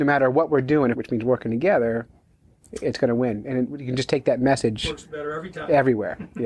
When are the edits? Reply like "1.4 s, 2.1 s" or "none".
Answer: 0.9 s

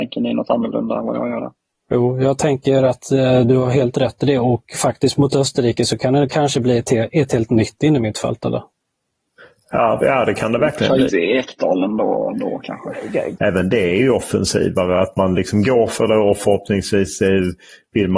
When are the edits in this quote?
10.0 s, 11.1 s, 13.4 s

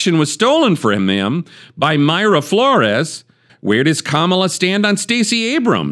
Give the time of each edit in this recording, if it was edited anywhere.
3.5 s

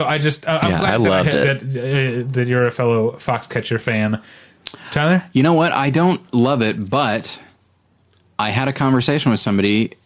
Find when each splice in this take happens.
none

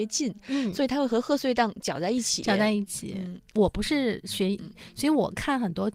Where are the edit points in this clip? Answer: 3.4 s, 4.6 s

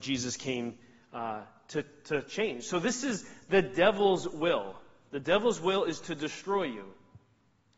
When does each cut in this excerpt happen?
none

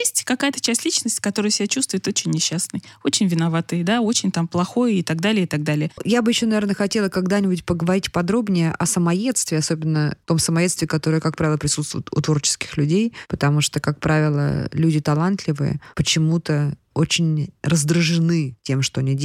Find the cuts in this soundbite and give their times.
6.0 s

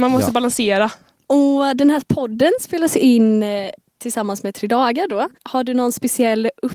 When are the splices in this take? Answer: 1.2 s, 5.3 s

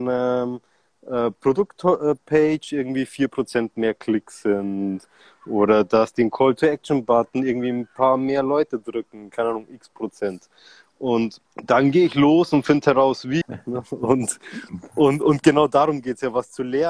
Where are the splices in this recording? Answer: 11.5 s, 13.4 s

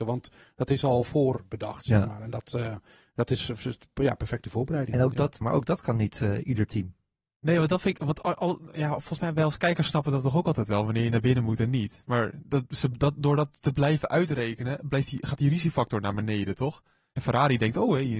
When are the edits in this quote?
5.4 s

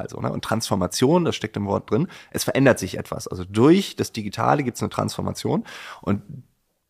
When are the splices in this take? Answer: none

